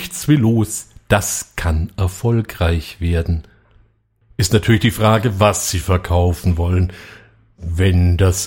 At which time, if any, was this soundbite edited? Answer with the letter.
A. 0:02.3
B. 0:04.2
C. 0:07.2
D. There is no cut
B